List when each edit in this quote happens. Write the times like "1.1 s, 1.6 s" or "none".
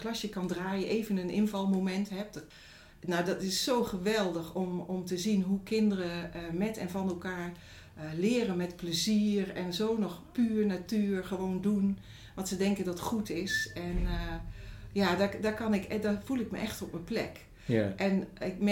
none